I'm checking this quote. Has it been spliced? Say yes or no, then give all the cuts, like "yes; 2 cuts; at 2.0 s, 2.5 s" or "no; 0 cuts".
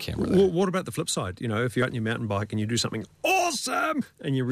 no; 0 cuts